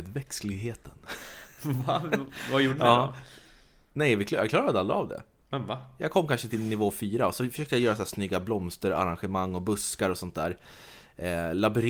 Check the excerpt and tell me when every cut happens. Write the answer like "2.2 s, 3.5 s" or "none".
6.5 s